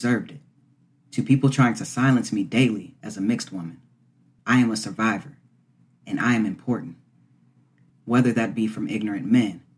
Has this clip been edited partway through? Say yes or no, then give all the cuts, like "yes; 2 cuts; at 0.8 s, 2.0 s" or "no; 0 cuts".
yes; 2 cuts; at 4.4 s, 7.9 s